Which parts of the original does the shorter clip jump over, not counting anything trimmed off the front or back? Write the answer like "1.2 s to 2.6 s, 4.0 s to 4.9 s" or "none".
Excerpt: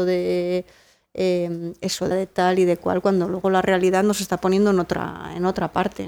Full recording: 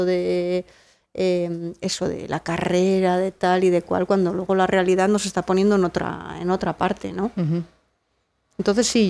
2.1 s to 3.2 s

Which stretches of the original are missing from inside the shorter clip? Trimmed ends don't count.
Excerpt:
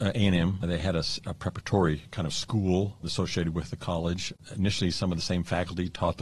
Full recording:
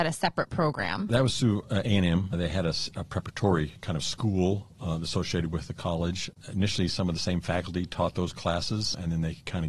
4.7 s to 5.0 s

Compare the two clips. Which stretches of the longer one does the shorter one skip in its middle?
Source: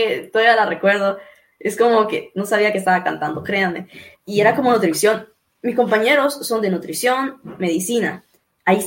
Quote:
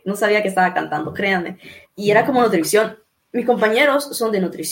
none

